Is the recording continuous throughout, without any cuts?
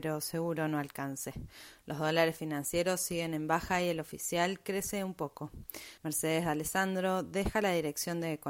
no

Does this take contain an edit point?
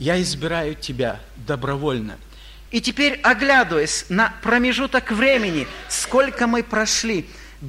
yes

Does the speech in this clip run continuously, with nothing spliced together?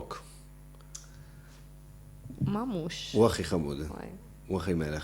yes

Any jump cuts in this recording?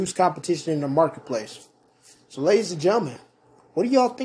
no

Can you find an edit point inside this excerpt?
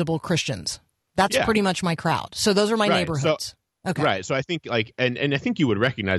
no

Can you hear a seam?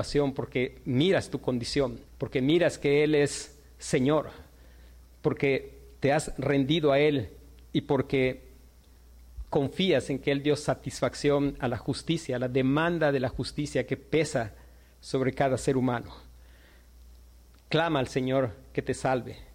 yes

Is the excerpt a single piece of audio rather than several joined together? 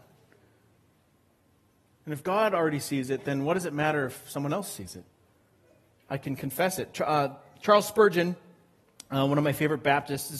yes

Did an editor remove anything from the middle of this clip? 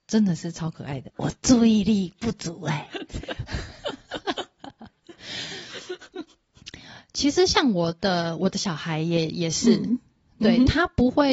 yes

